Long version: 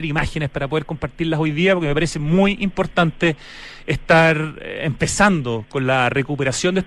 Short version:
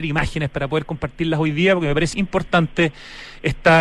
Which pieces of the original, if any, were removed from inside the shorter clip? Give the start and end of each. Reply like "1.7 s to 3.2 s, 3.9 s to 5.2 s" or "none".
2.1 s to 2.6 s